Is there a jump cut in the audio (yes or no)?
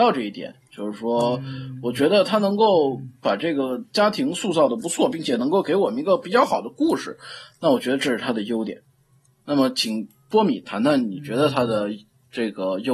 no